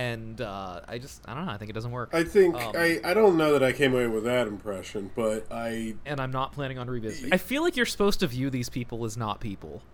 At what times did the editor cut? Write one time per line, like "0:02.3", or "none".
0:06.1
0:07.3